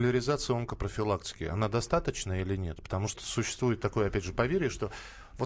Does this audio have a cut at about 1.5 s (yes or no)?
no